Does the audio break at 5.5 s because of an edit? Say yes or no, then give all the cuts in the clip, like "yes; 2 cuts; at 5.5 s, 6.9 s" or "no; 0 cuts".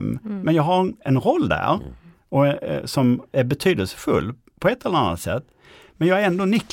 no; 0 cuts